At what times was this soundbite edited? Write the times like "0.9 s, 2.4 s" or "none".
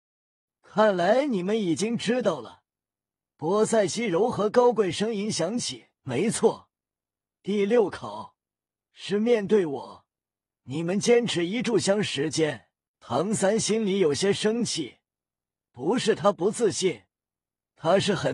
12.9 s